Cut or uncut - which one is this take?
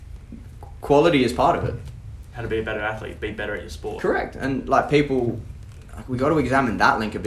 uncut